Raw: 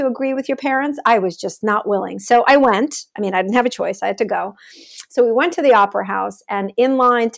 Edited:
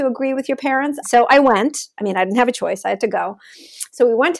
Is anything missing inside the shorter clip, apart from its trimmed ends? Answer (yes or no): yes